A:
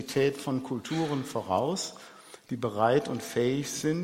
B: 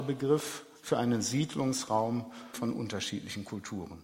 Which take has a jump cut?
B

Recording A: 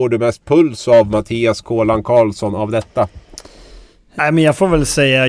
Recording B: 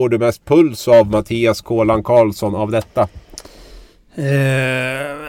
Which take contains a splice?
A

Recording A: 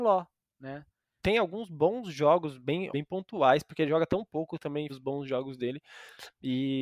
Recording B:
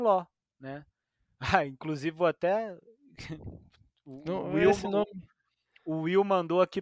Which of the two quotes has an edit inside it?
A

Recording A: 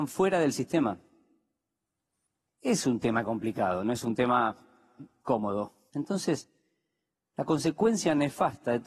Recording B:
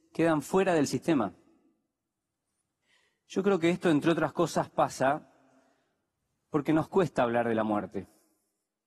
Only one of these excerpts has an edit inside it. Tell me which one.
A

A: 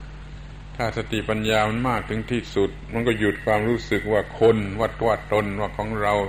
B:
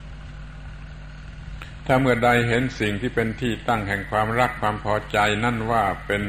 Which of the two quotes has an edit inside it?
A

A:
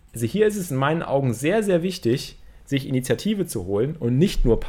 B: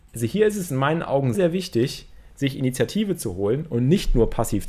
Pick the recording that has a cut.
B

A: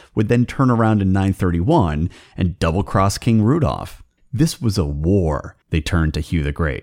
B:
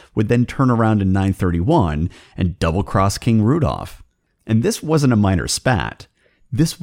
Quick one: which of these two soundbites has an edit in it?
A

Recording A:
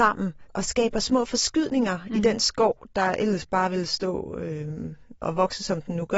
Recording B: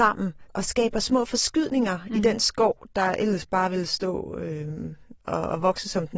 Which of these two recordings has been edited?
A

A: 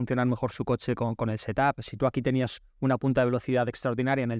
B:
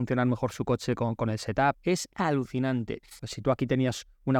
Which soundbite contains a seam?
B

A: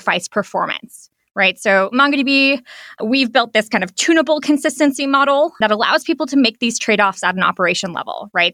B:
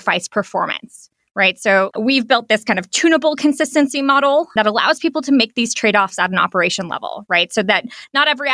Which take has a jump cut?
B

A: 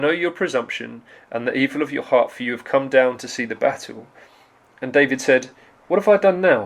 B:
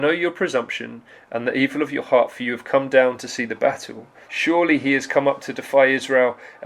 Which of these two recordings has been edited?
B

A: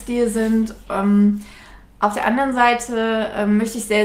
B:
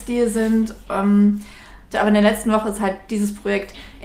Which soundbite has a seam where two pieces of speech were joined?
B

